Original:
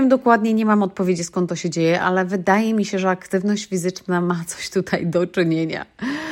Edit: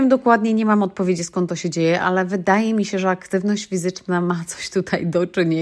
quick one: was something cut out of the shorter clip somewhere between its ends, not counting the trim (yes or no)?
no